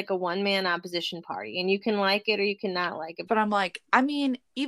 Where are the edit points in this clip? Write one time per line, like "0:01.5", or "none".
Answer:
0:03.3